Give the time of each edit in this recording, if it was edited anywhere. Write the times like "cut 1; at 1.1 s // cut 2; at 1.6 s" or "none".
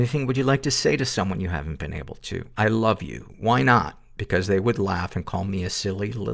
none